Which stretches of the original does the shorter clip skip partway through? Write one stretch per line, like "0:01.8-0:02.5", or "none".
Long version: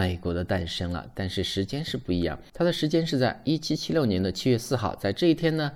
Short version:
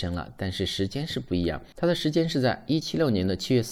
0:03.6-0:03.8